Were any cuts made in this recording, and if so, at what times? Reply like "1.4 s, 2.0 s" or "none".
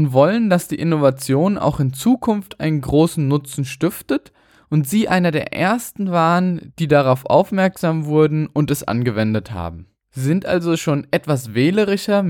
10.0 s